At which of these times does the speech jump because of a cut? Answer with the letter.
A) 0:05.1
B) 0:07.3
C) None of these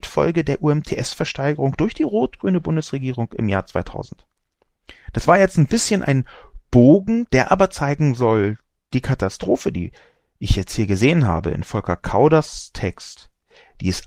C